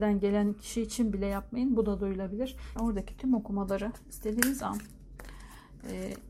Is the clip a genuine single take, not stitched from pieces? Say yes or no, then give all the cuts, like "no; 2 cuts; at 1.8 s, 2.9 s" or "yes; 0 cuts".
no; 1 cut; at 2.8 s